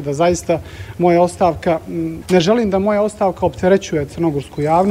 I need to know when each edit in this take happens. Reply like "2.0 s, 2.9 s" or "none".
2.2 s